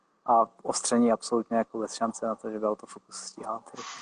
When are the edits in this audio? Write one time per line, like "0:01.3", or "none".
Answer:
none